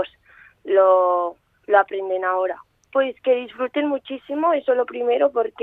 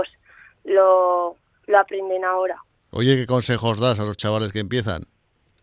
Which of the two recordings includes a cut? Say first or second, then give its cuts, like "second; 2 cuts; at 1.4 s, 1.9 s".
first; 1 cut; at 2.9 s